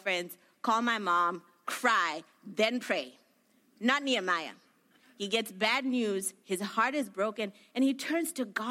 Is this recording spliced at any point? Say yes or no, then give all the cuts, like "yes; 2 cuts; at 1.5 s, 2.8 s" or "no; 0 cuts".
no; 0 cuts